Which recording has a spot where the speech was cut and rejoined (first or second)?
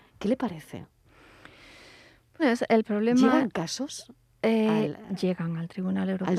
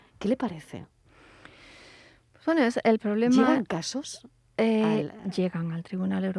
first